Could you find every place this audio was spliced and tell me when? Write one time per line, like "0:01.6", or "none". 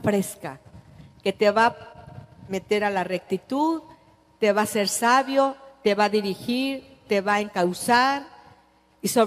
none